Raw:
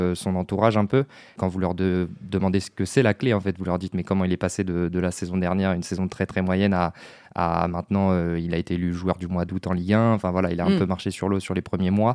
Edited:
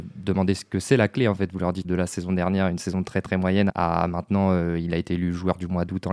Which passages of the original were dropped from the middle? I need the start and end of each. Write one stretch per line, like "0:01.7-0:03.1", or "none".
0:03.9-0:04.9
0:06.7-0:07.3

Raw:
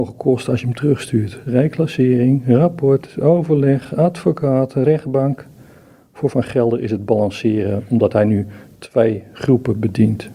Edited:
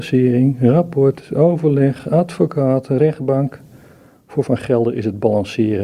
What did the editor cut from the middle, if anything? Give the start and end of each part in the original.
none

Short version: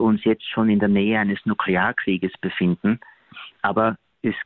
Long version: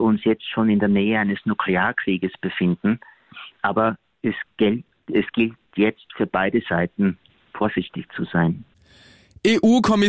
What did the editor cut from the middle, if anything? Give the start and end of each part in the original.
none

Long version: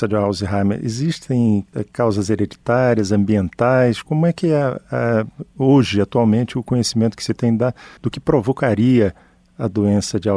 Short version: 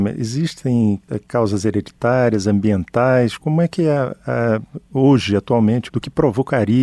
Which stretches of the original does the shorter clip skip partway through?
0:06.5-0:08.0

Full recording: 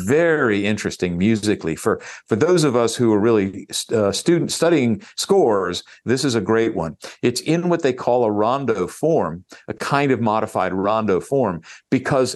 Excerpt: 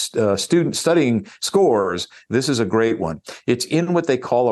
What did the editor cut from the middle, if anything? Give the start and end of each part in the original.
none

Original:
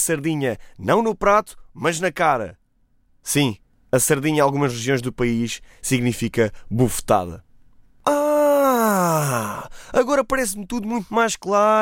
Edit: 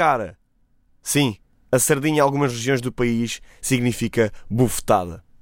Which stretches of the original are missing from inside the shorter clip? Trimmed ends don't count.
none

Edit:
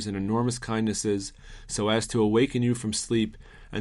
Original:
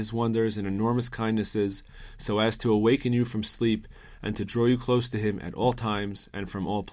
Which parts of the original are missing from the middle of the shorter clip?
none

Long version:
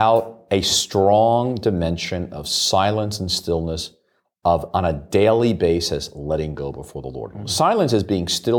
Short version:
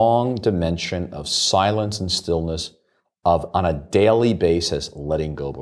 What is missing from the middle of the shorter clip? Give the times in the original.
none

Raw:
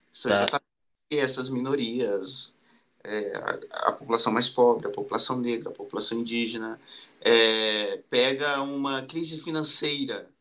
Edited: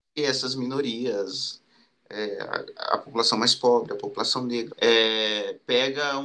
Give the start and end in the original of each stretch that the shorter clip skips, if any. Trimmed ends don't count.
0:05.6-0:07.1

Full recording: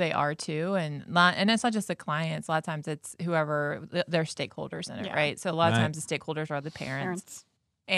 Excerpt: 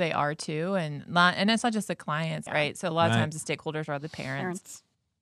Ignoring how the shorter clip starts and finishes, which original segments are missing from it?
0:02.5-0:05.1

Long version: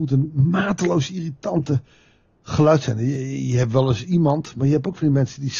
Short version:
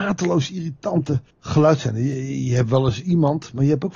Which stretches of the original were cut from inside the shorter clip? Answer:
0:01.9-0:02.3

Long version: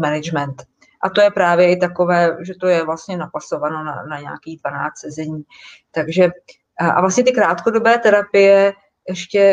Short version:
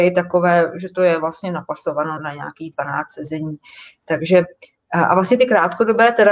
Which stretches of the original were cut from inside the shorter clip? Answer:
0:03.8-0:04.0

